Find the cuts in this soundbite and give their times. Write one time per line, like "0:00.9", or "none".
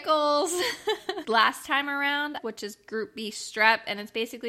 0:01.2
0:02.4

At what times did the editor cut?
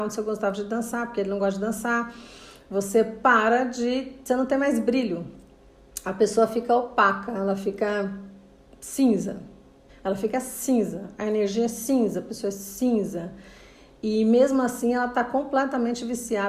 0:09.9

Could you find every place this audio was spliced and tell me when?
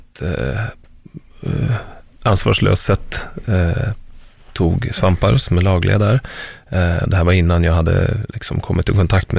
0:07.0

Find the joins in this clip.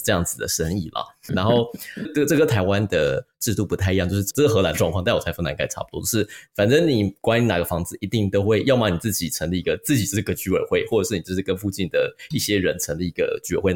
0:01.3

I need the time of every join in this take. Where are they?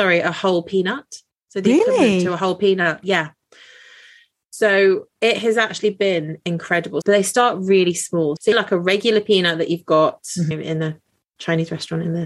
0:05.1
0:07.0
0:08.4

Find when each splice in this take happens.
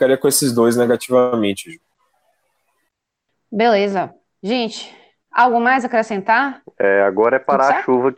0:06.6

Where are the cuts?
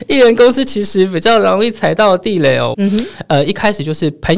0:02.7

